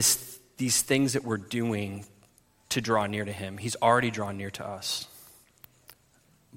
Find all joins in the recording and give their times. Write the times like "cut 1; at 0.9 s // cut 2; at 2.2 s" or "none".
none